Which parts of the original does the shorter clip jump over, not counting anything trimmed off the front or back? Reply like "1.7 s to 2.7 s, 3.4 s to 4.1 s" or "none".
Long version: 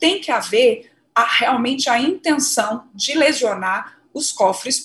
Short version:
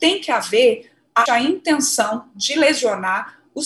1.3 s to 1.8 s